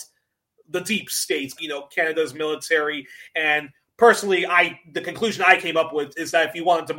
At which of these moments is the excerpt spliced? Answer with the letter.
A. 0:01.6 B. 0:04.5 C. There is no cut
A